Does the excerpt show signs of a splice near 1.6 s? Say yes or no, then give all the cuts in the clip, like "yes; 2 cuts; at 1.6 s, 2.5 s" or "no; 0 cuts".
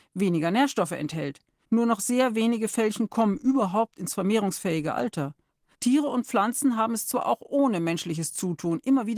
yes; 2 cuts; at 1.6 s, 5.7 s